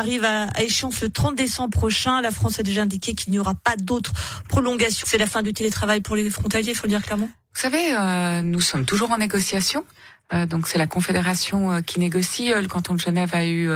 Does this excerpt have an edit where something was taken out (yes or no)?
yes